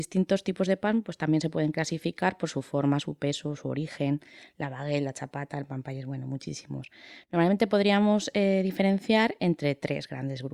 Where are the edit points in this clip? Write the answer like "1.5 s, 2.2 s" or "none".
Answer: none